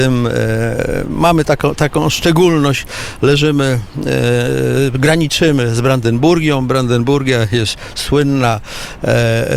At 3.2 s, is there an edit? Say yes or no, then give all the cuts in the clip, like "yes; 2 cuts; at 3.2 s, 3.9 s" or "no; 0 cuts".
no; 1 cut; at 1.4 s